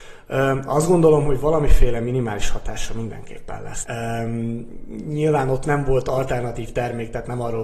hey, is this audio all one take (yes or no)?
no